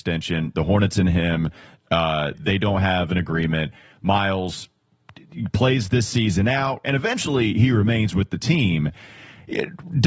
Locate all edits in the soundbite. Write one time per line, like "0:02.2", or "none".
0:02.3
0:06.8